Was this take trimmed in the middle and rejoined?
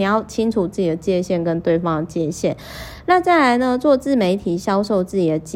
no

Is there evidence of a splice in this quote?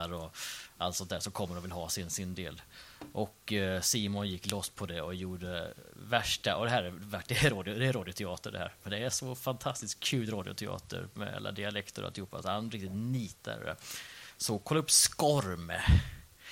no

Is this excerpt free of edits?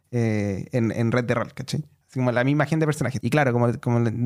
no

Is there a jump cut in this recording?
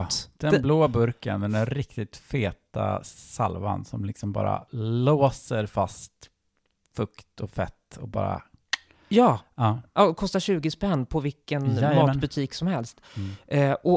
no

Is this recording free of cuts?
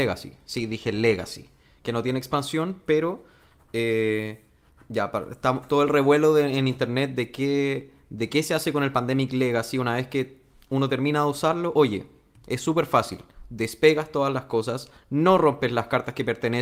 yes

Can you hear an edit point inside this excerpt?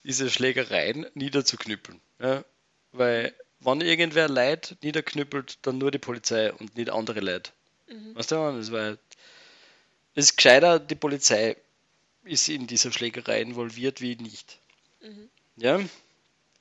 no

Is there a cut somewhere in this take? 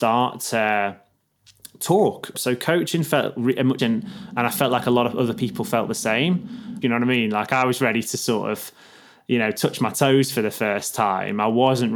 yes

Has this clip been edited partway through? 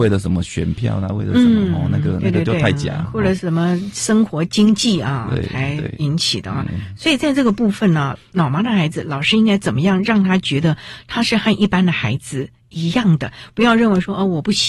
no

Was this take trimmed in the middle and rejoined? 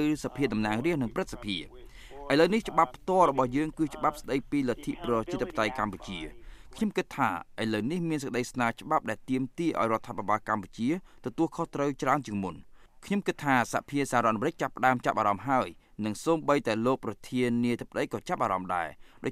no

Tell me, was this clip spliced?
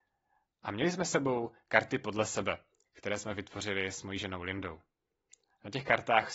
no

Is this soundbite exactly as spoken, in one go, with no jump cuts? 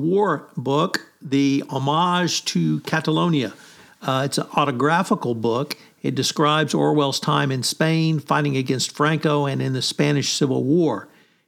yes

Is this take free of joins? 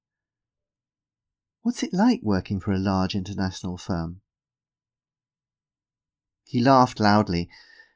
yes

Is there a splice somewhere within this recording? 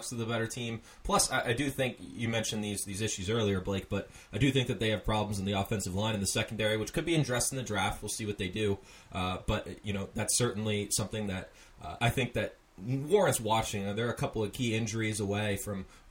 yes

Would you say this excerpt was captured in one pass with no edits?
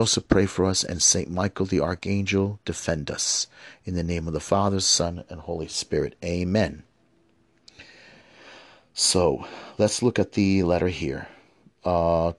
yes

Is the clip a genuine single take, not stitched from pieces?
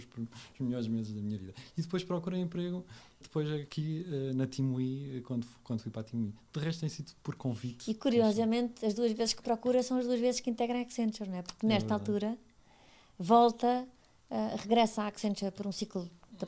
no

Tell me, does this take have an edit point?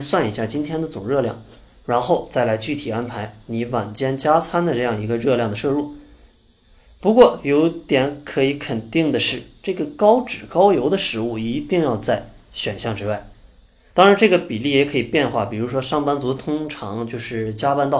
yes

